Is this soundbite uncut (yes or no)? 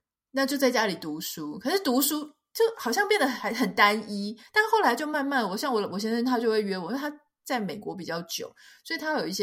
yes